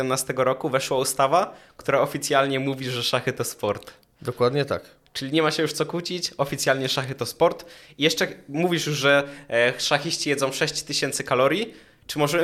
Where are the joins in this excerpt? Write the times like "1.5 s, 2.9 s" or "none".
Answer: none

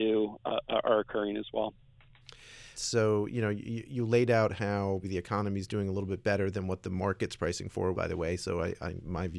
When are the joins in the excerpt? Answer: 2.7 s, 5.0 s, 7.9 s

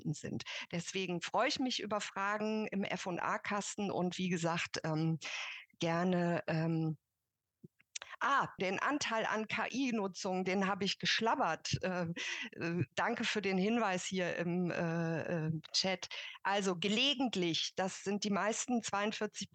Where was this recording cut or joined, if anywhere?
8.6 s

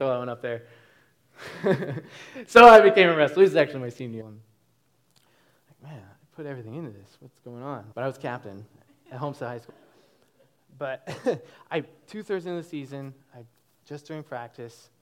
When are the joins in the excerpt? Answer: 4.2 s, 7.9 s, 9.7 s

